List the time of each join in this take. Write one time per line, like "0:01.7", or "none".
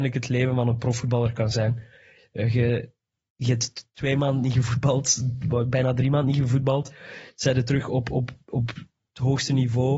none